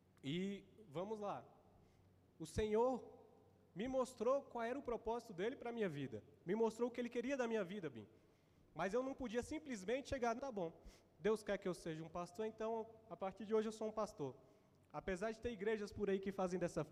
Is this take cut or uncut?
cut